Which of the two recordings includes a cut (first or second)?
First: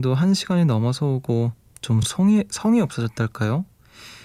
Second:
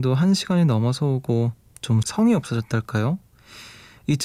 second